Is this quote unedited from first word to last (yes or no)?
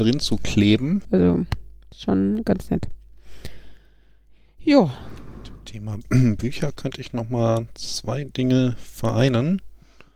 no